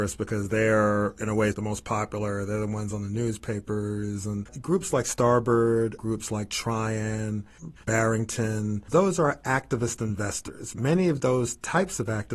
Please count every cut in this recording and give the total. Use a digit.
1